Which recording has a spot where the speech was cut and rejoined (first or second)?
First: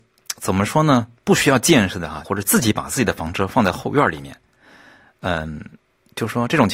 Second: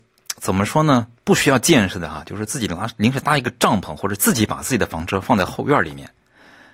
first